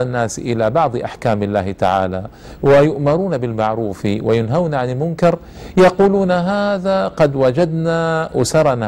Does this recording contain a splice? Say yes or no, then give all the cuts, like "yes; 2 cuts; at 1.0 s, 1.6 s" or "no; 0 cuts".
no; 0 cuts